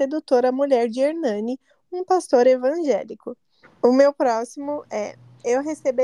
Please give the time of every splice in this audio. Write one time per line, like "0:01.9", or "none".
0:03.6